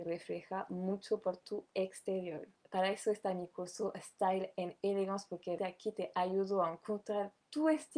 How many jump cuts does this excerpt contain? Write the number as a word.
two